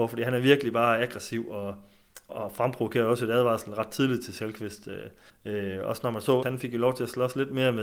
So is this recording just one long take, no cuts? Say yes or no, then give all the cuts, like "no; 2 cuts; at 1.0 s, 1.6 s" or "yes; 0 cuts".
no; 3 cuts; at 2.3 s, 5.3 s, 6.4 s